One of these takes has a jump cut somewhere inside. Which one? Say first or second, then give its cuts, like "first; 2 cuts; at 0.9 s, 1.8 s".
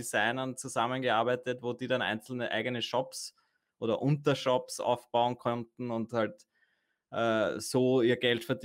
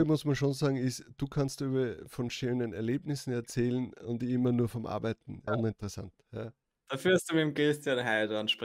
second; 1 cut; at 5.5 s